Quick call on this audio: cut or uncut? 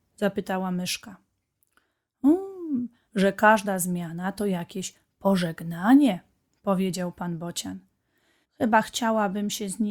cut